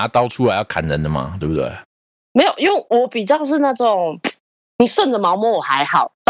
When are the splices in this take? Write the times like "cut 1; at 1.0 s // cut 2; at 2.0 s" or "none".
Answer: none